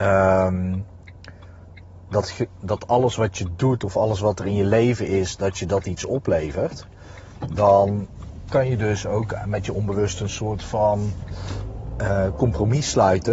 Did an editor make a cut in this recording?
no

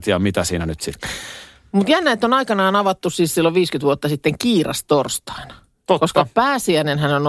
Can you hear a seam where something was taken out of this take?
no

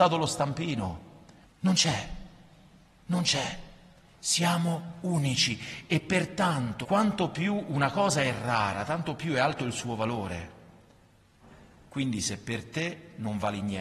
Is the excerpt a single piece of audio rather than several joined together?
no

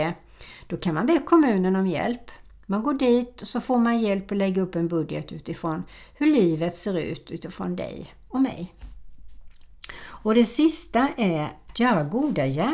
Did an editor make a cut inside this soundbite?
no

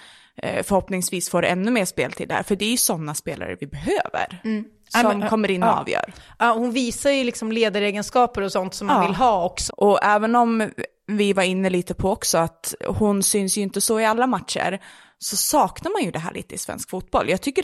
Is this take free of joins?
no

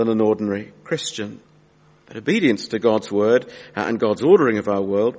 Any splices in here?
no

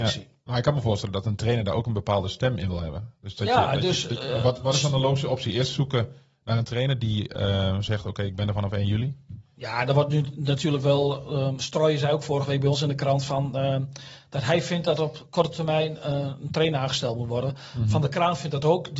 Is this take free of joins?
yes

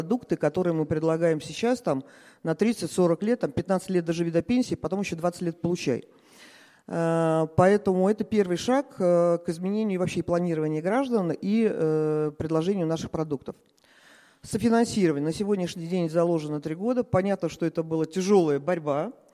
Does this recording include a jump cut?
no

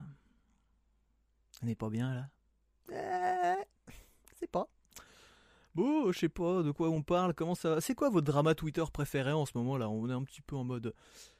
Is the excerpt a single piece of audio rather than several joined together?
yes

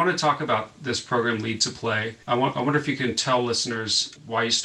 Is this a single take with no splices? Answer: no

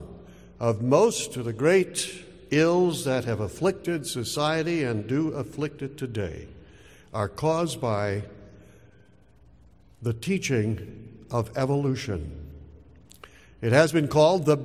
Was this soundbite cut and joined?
no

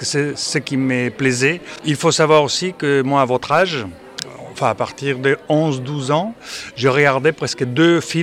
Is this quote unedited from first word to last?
yes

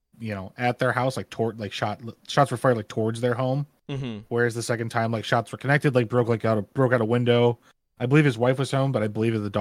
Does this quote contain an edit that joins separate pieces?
no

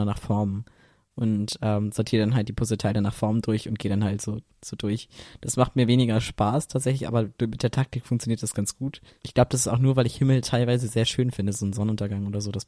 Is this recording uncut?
no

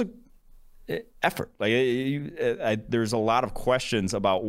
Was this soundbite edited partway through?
no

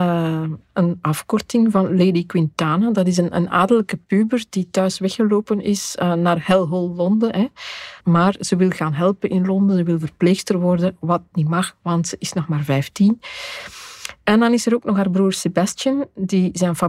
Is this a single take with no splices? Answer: no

